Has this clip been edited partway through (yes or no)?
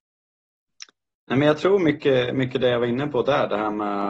no